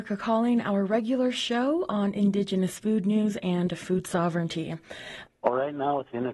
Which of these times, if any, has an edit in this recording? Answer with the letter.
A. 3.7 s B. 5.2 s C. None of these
B